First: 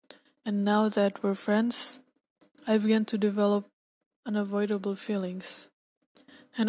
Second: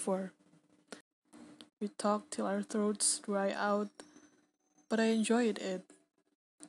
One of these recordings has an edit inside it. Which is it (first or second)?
second